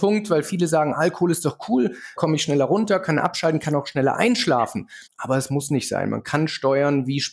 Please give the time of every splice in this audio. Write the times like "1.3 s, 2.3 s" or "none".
2.2 s, 5.1 s